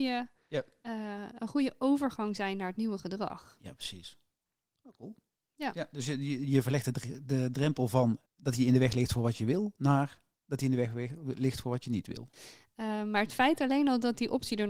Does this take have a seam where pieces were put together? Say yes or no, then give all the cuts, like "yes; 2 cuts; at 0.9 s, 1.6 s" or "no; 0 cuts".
yes; 2 cuts; at 8.3 s, 12.3 s